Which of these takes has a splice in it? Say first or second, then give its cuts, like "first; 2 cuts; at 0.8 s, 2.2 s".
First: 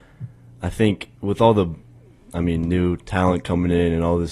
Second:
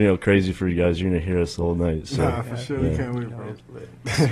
first; 1 cut; at 1.2 s